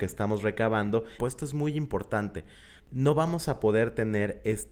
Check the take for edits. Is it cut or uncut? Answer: cut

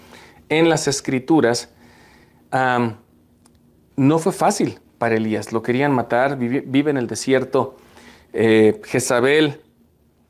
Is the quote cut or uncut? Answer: uncut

